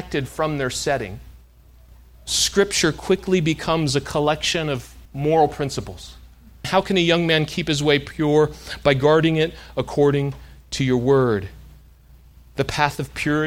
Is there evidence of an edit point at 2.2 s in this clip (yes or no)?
no